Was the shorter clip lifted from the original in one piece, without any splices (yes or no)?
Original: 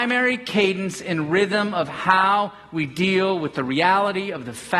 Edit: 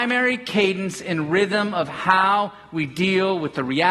yes